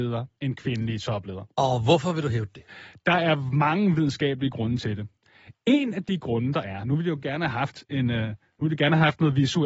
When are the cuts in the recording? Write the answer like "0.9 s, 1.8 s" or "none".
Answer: none